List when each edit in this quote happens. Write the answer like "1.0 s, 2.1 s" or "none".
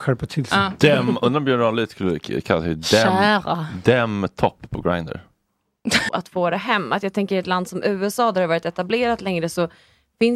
6.1 s